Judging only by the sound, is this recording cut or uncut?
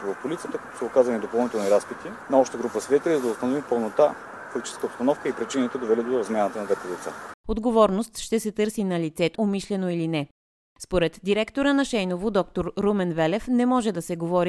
cut